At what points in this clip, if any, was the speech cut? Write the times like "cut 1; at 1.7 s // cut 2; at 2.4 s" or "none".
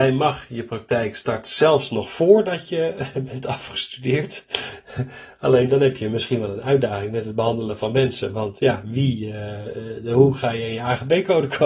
none